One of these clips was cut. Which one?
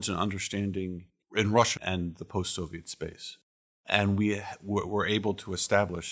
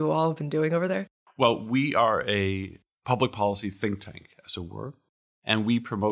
first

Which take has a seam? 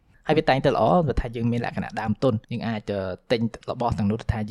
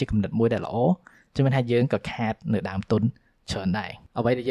first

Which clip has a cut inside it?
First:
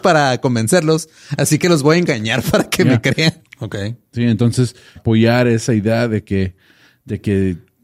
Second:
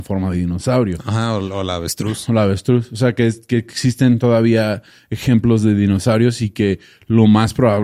first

